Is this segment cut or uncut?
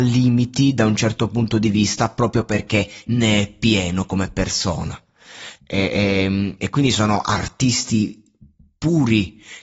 cut